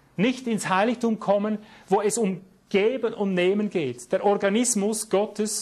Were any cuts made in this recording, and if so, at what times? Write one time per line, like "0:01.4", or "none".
none